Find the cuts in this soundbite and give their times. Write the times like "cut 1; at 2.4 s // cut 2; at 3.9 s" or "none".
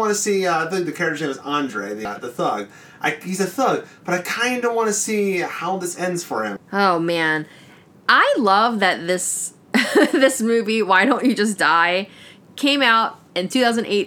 cut 1; at 6.6 s